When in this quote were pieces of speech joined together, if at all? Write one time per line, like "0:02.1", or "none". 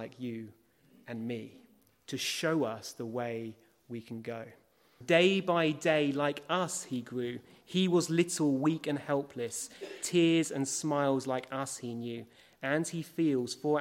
0:05.0